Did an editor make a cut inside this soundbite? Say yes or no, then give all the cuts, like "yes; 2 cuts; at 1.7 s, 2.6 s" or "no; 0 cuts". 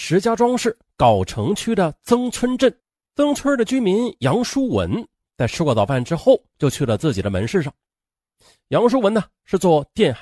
yes; 1 cut; at 3.3 s